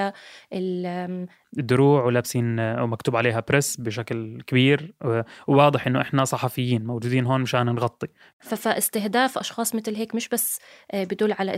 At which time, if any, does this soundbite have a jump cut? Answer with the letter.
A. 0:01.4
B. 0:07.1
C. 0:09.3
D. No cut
A